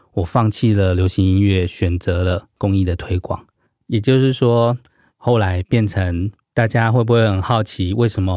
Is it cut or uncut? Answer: cut